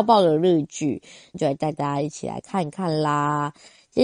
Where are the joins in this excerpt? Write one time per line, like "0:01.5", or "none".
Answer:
0:01.3